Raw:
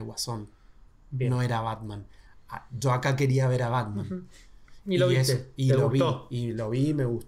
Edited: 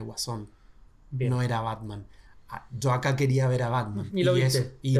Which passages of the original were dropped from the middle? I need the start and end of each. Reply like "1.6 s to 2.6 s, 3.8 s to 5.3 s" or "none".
4.1 s to 4.8 s